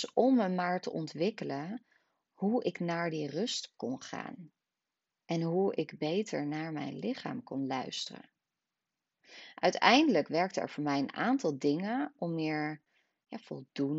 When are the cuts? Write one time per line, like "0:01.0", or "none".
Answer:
none